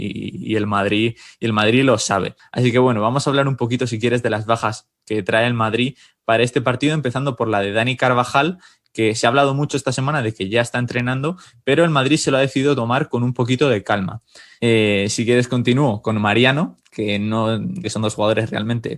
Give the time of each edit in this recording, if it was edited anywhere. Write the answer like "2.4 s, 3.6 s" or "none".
14.6 s, 17.8 s

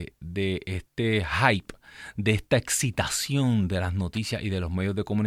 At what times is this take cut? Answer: none

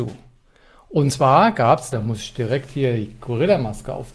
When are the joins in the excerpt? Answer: 1.9 s

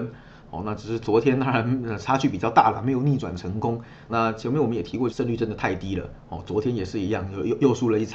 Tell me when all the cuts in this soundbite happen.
4.1 s, 5.1 s

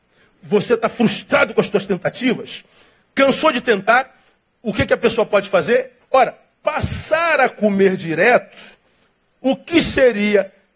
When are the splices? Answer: 6.0 s

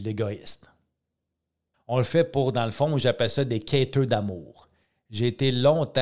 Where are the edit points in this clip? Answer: 1.7 s

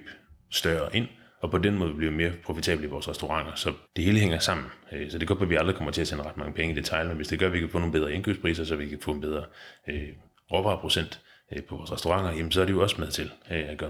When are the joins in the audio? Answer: 3.9 s

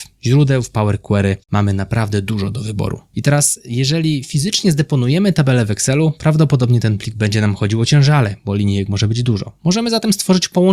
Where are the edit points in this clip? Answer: 1.4 s

